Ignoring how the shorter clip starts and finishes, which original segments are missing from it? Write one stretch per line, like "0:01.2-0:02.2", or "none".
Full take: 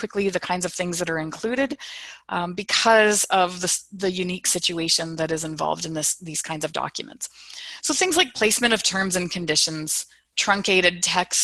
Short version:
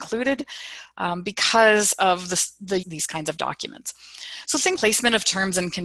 0:04.1-0:06.2
0:08.1-0:08.3